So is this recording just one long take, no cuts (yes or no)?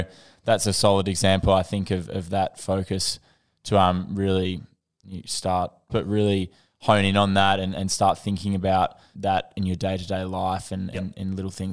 no